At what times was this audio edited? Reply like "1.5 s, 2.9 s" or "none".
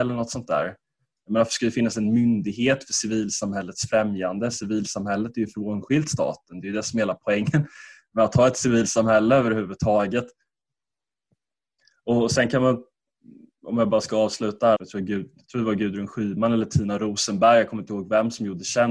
14.8 s